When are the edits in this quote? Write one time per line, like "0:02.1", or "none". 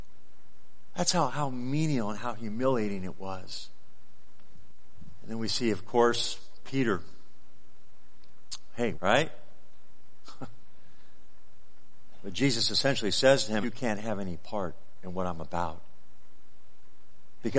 0:08.9
0:13.6

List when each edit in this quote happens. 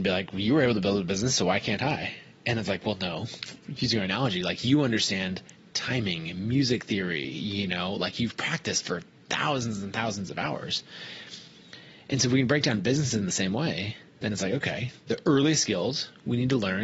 none

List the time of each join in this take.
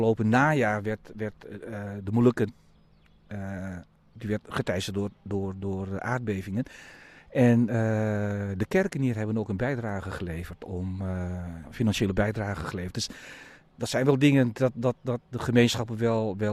none

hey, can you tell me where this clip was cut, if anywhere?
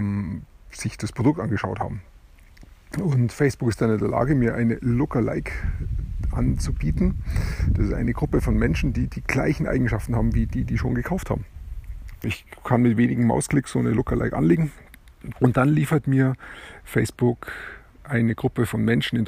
0:12.2
0:15.3

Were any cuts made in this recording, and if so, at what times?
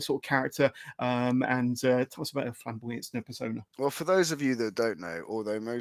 0:03.7

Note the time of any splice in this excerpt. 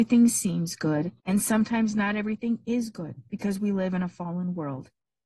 0:01.2

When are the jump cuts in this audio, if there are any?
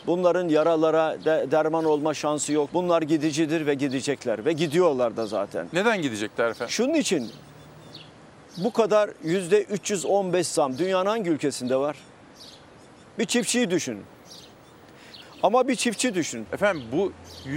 0:02.7
0:15.2
0:16.5

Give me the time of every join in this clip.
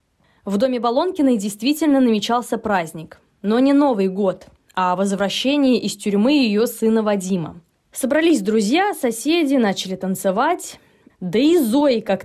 0:11.1

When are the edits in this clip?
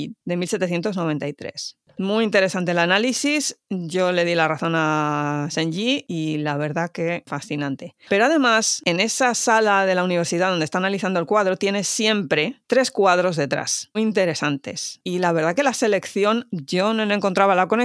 0:13.9
0:16.5

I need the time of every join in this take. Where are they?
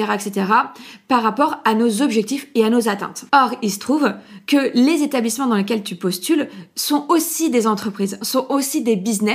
0:03.3

